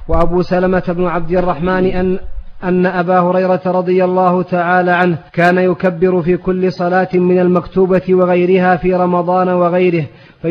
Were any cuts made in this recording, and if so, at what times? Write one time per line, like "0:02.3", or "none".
0:05.3